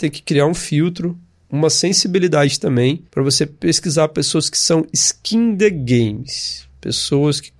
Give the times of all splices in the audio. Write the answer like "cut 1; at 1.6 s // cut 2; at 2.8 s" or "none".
cut 1; at 3.1 s